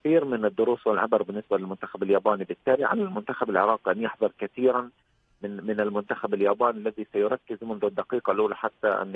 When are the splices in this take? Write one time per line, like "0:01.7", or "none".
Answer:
none